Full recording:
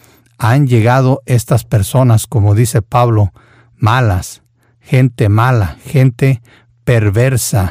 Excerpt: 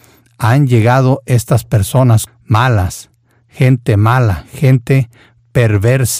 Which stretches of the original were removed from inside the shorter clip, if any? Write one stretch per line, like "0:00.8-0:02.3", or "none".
0:02.3-0:03.6